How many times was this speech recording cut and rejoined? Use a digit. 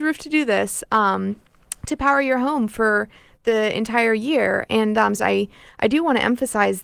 1